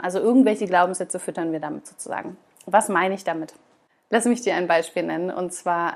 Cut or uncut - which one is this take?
uncut